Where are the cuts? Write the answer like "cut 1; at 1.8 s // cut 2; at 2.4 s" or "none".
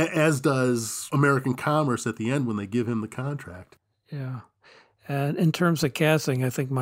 none